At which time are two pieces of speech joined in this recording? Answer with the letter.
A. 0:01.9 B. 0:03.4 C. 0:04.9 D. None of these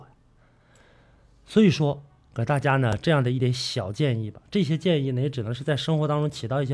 B